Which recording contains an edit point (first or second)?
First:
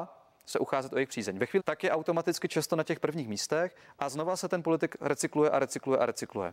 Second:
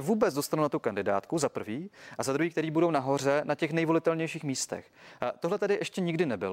first